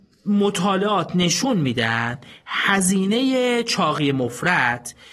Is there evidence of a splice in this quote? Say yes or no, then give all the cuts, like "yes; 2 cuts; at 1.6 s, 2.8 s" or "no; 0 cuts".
no; 0 cuts